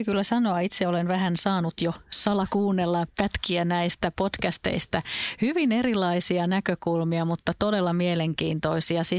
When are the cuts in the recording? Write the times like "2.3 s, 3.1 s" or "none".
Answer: none